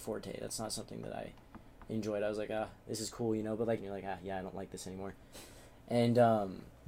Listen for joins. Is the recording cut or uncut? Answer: cut